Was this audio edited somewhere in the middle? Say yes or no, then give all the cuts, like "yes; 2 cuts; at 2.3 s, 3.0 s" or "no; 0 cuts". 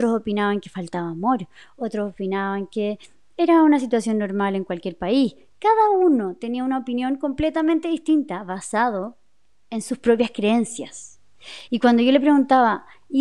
no; 0 cuts